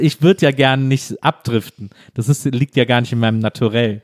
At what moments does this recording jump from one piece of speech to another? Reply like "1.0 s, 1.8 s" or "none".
none